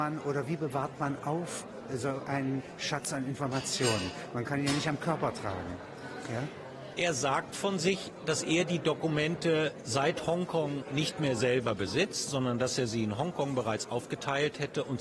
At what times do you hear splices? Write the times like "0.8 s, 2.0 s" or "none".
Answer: none

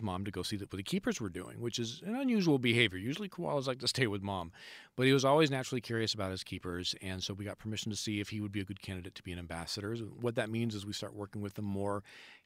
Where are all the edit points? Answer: none

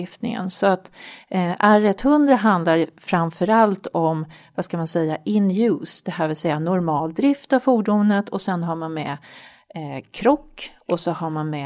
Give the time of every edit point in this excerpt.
none

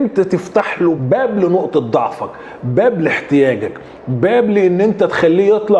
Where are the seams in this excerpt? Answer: 1.0 s

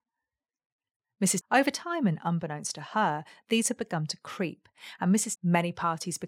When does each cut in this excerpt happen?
1.4 s, 5.4 s

